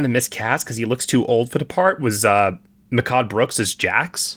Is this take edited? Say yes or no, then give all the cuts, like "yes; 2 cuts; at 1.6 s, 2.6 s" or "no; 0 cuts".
no; 0 cuts